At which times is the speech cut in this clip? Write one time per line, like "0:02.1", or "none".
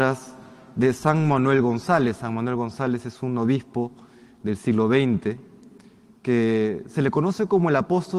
none